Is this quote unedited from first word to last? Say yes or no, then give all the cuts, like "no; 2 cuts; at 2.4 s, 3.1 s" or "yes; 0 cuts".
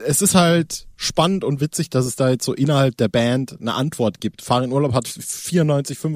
yes; 0 cuts